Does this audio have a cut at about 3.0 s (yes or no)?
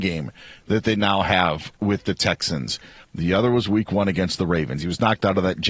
yes